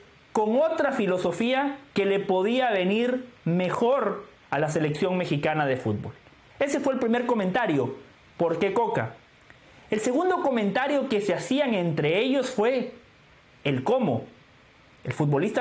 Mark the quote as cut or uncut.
uncut